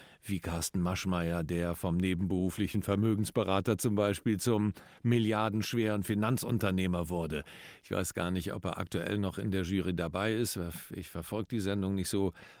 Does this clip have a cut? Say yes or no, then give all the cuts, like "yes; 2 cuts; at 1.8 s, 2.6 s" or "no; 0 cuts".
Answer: no; 0 cuts